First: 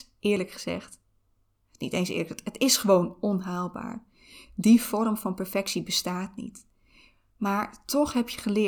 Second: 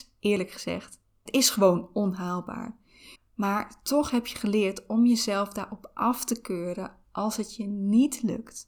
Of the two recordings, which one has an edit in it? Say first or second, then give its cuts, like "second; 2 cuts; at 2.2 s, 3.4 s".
second; 2 cuts; at 1.3 s, 3.2 s